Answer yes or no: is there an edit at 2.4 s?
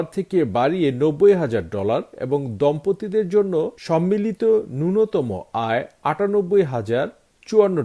no